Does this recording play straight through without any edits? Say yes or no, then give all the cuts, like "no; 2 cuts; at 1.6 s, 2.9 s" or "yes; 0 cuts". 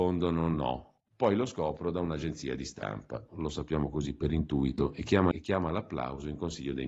no; 2 cuts; at 3.3 s, 5.3 s